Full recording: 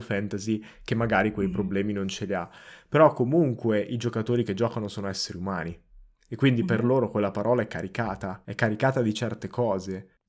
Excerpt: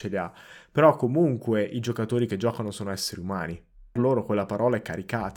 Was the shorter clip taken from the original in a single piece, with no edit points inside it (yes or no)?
no